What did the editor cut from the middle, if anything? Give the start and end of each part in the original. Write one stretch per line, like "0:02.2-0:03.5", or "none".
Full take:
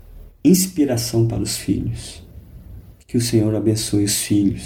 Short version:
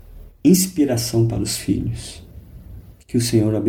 none